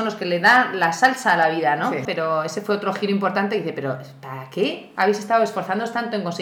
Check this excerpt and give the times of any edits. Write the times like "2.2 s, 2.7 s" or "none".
2.1 s